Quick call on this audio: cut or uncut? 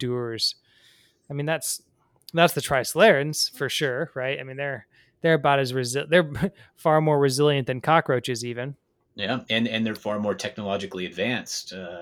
uncut